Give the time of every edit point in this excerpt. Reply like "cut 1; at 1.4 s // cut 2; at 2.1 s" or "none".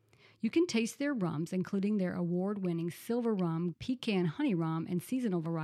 cut 1; at 3.7 s